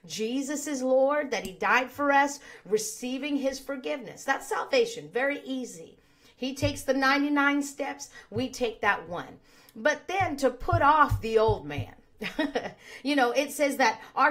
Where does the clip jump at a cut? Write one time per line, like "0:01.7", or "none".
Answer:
none